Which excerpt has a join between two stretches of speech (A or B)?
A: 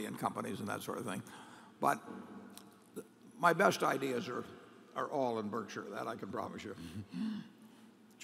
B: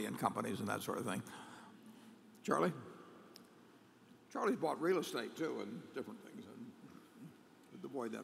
B